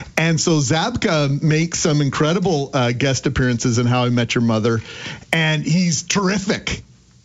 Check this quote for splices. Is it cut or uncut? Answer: uncut